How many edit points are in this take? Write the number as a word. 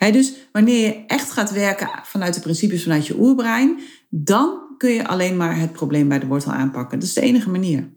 zero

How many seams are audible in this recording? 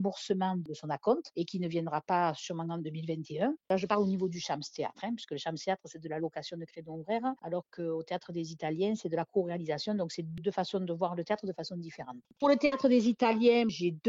zero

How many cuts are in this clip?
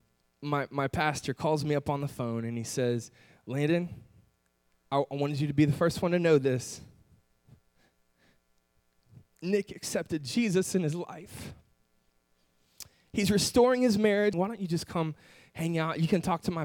one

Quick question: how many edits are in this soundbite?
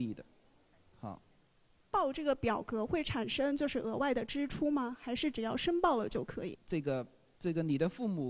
one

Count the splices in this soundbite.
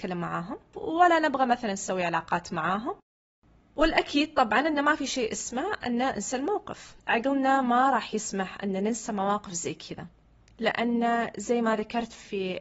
one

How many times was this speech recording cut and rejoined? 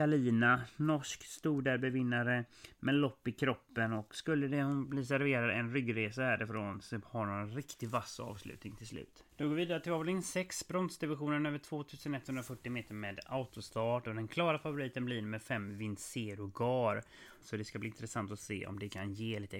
two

